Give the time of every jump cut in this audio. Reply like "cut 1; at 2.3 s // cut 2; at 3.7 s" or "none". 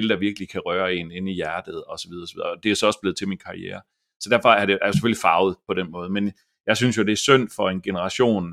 none